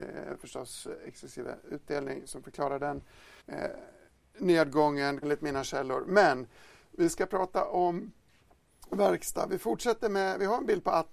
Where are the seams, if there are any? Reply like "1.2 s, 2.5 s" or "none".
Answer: 3.4 s, 5.2 s